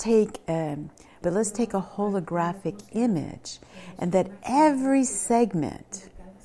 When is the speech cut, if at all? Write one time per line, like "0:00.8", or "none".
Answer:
0:01.2